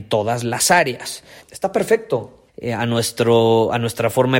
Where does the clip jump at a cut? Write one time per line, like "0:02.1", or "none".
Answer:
0:01.4
0:02.5